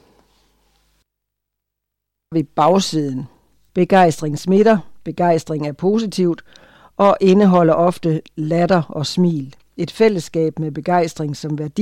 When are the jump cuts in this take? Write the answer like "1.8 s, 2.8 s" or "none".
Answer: 3.7 s